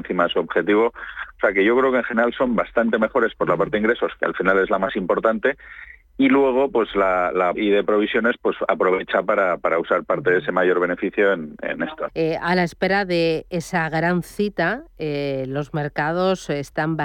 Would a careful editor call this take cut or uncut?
cut